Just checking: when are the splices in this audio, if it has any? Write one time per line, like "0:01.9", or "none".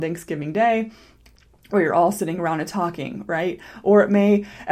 0:03.8